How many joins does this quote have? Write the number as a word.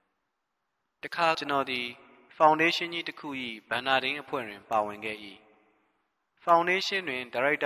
one